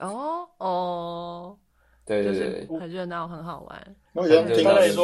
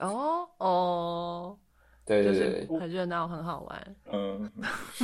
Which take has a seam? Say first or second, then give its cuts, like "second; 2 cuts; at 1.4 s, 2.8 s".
second; 1 cut; at 4.1 s